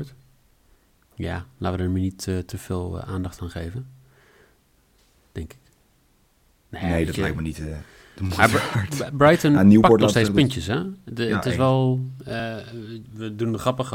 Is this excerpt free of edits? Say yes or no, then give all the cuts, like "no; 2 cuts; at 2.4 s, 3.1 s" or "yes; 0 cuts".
yes; 0 cuts